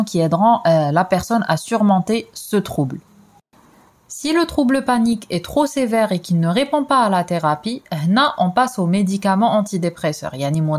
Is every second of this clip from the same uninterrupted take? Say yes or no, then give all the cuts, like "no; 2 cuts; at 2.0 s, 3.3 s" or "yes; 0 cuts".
yes; 0 cuts